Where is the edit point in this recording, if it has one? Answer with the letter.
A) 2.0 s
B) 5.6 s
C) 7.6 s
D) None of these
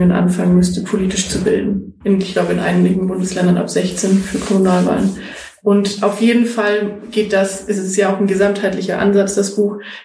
A